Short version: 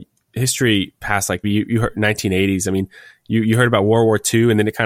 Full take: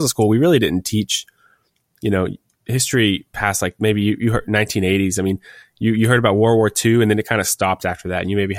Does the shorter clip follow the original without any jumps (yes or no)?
no